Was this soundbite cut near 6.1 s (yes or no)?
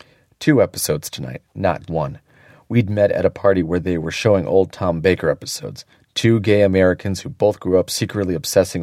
no